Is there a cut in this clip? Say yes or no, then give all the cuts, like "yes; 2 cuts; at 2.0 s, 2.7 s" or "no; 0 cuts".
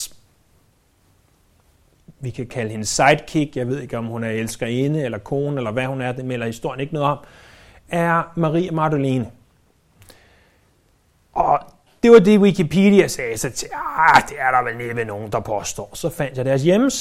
no; 0 cuts